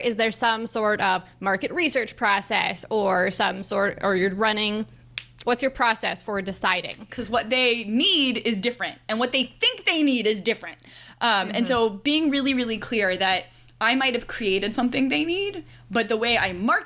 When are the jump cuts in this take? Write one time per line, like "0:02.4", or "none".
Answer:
0:07.1